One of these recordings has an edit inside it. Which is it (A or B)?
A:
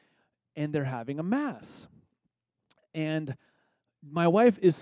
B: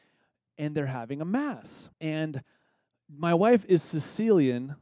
B